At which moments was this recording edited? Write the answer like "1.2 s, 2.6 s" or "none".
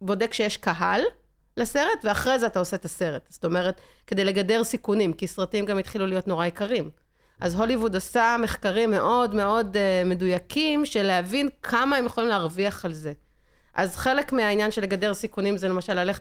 none